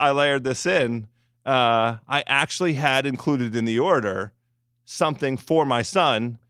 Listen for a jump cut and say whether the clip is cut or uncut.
uncut